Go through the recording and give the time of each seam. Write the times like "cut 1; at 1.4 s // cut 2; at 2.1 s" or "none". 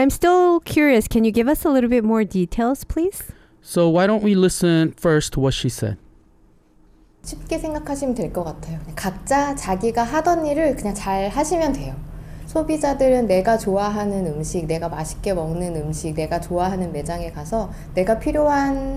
none